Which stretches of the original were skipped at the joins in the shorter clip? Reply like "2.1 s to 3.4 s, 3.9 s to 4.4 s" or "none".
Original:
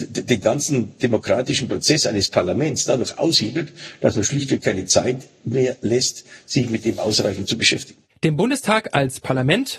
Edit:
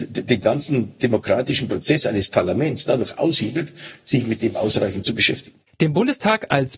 4.0 s to 6.4 s